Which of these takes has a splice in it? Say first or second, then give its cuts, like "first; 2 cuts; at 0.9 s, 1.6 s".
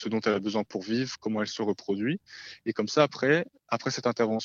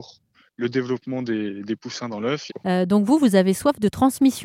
second; 1 cut; at 2.5 s